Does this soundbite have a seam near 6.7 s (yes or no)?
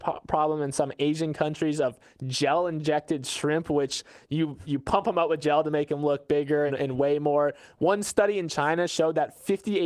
yes